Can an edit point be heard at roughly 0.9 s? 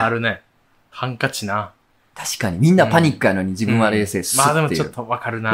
yes; 1 cut; at 0.9 s

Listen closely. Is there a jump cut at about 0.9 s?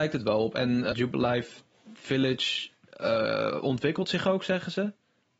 yes; 1 cut; at 0.9 s

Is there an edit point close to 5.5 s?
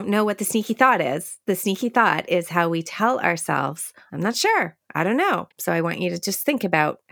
yes; 1 cut; at 5.5 s

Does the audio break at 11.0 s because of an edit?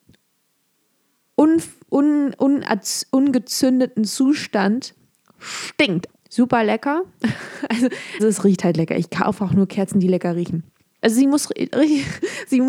yes; 3 cuts; at 6.1 s, 8.2 s, 11.0 s

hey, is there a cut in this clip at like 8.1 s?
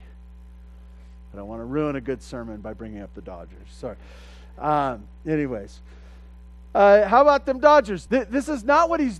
yes; 2 cuts; at 1.3 s, 8.1 s

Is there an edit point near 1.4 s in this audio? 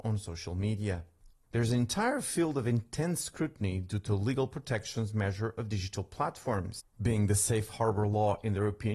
yes; 2 cuts; at 1.4 s, 6.9 s

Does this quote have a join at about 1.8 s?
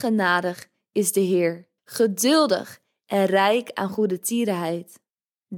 yes; 1 cut; at 1.8 s

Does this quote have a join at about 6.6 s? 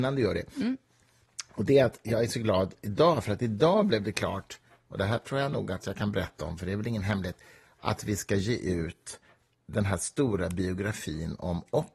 no; 0 cuts

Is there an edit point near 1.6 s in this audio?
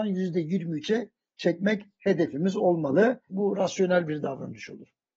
no; 1 cut; at 3.3 s

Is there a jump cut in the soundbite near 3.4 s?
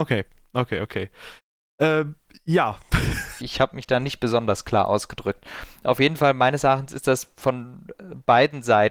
yes; 1 cut; at 3.4 s

